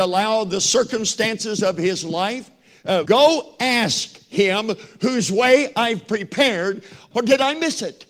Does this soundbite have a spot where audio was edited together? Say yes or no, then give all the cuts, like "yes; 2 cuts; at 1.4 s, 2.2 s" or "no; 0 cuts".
yes; 2 cuts; at 3.1 s, 7.1 s